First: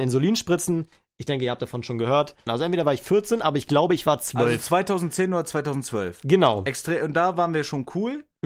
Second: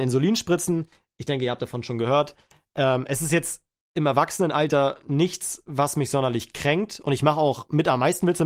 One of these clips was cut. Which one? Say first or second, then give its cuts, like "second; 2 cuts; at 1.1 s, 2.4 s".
first; 1 cut; at 2.5 s